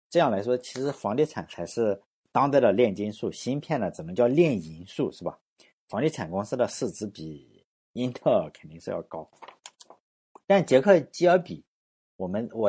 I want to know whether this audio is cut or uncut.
uncut